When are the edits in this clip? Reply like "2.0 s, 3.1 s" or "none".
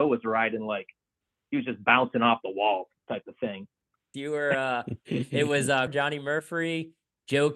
4.1 s, 5.9 s